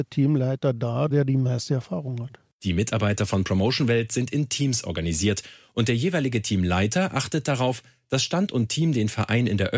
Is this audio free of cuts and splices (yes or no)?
no